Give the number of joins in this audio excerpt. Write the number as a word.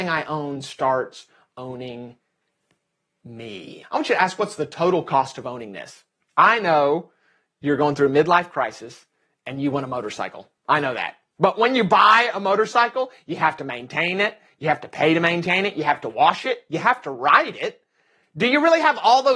two